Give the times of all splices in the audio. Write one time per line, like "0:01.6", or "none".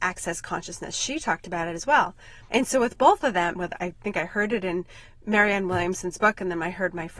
0:00.9
0:02.5
0:03.5

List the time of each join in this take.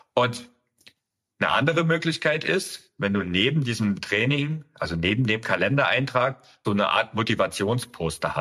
0:06.6

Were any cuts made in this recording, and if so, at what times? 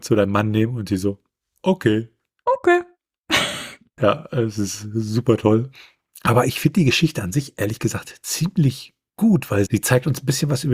0:09.7

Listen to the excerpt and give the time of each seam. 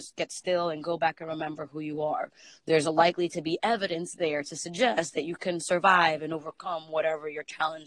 none

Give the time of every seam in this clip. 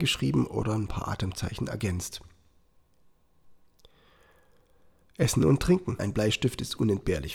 0:06.0

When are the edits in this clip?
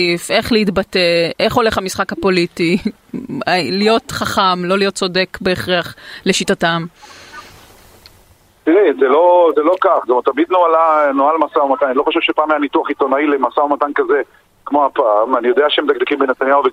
none

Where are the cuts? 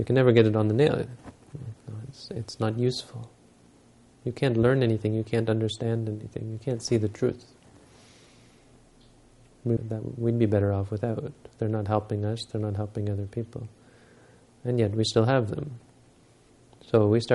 0:01.8
0:09.8

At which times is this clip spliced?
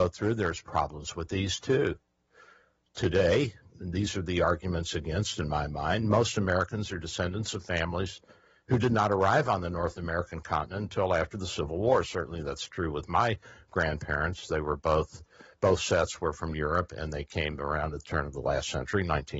none

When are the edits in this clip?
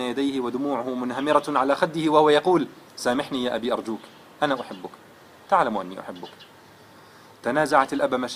0:02.9

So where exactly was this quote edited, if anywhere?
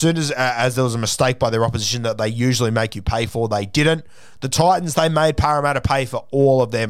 none

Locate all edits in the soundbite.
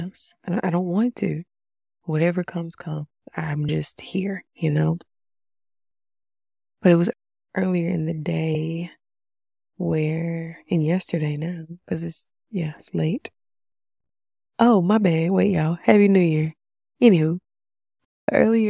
none

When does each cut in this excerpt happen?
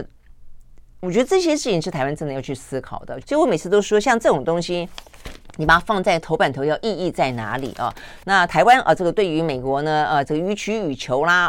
0:03.2
0:08.2
0:10.2

